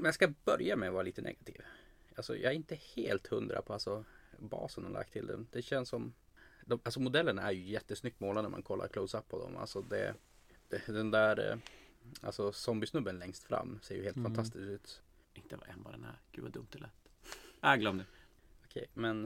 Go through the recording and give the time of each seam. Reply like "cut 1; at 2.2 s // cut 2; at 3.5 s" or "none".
cut 1; at 15.2 s